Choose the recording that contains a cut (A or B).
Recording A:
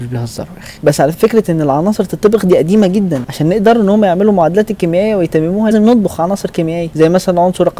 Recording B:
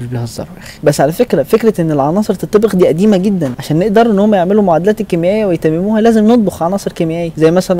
A